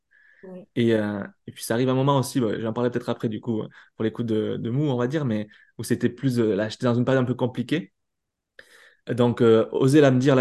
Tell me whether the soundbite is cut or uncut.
uncut